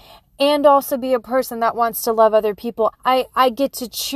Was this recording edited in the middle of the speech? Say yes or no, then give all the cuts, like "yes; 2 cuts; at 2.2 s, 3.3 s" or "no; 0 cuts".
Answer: yes; 1 cut; at 2.9 s